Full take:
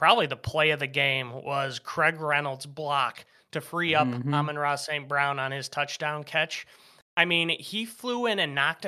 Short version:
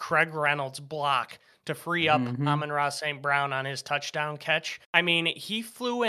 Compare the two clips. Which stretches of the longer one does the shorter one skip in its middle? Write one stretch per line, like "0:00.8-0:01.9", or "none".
0:06.7-0:07.1